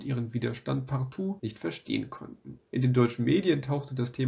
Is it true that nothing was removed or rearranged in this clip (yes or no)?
yes